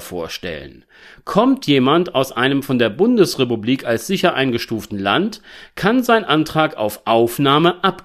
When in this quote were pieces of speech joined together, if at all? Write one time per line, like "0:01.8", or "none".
none